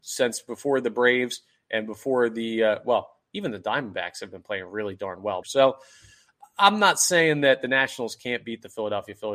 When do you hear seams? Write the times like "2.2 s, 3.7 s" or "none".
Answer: 5.4 s